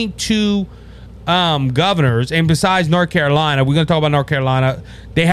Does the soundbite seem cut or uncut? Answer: uncut